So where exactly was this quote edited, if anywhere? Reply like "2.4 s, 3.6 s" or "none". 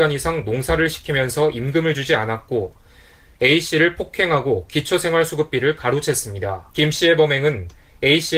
6.7 s